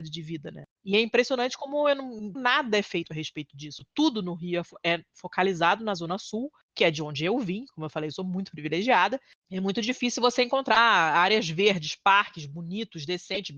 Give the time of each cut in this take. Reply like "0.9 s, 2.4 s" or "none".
2.4 s